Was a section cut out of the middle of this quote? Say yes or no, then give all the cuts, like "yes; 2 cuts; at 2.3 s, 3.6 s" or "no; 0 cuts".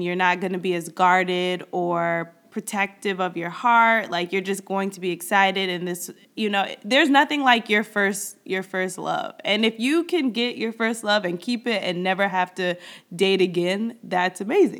no; 0 cuts